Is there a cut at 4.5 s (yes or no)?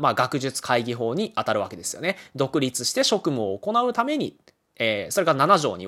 no